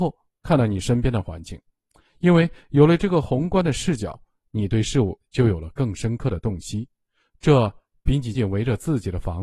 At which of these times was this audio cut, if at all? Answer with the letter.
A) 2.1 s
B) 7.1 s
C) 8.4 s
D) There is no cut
C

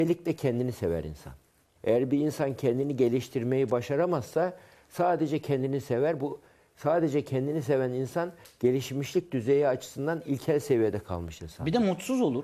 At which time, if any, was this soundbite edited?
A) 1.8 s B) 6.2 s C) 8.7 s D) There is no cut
A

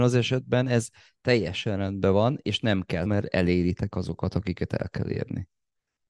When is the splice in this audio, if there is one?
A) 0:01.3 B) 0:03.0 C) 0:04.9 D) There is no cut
B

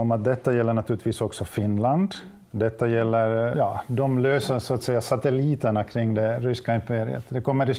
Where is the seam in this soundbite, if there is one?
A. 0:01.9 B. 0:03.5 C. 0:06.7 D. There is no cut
B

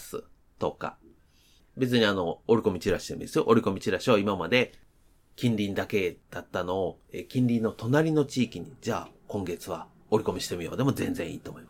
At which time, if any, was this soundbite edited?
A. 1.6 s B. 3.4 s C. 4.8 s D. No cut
D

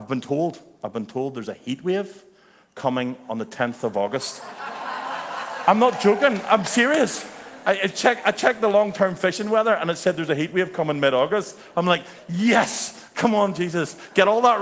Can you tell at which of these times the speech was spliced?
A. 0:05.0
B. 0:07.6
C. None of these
C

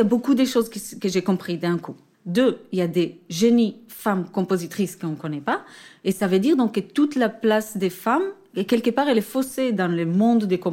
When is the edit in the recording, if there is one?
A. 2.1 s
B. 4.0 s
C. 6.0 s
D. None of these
A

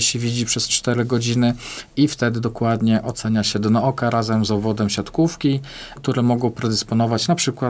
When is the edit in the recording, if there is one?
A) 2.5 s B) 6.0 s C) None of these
B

